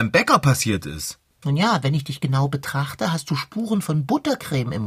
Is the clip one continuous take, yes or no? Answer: no